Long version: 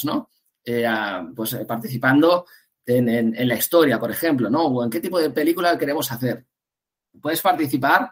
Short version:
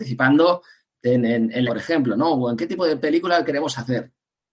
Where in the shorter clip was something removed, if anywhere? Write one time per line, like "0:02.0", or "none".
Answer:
0:01.7